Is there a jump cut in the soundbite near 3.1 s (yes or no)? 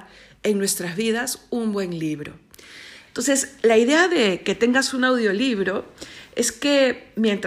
yes